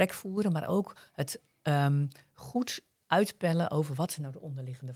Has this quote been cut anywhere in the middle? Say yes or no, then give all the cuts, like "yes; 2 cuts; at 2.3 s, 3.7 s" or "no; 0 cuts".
no; 0 cuts